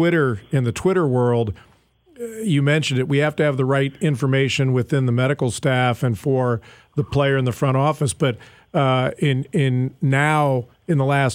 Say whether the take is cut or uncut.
uncut